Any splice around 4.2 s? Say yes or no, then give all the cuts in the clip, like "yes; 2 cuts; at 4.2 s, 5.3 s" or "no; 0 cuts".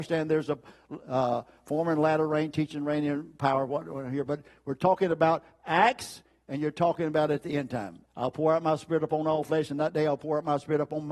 no; 1 cut; at 8.1 s